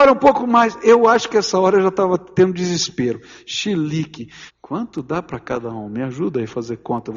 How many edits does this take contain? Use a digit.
1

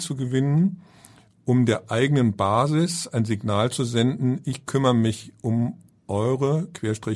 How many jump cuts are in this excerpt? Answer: 0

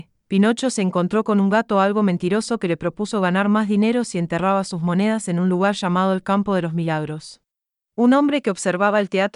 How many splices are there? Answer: 1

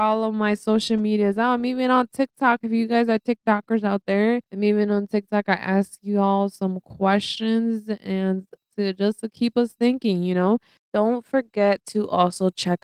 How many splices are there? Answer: 1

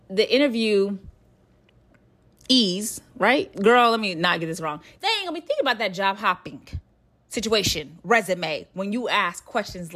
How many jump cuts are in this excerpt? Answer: 2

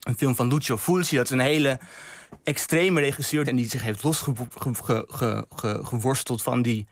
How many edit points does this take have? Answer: 1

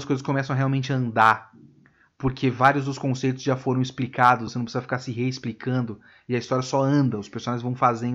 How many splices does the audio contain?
1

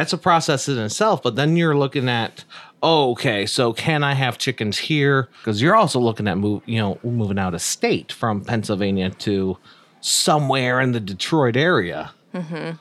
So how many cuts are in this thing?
1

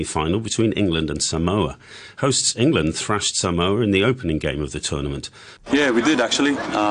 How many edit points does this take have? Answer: 1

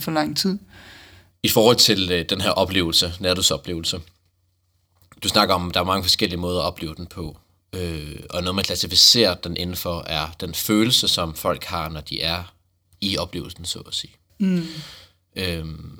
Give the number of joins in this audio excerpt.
1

